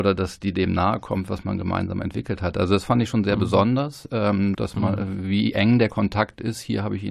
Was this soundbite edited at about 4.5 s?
yes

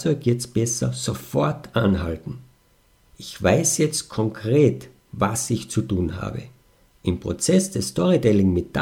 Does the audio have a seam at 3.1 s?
yes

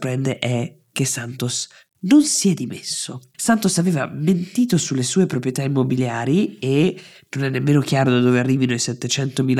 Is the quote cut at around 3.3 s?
yes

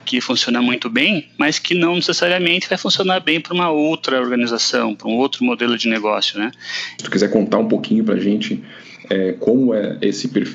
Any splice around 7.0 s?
yes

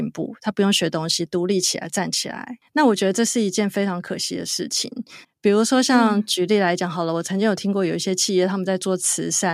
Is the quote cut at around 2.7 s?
no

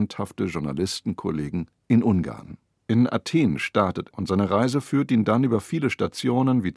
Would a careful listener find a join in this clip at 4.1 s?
yes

